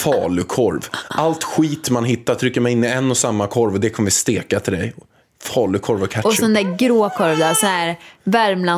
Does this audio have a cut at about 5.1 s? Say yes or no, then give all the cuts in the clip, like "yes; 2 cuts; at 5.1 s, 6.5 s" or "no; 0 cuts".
no; 0 cuts